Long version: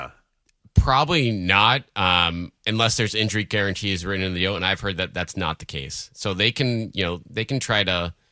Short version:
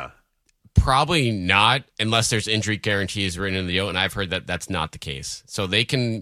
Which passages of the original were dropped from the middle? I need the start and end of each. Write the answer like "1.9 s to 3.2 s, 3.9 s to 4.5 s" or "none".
1.9 s to 2.6 s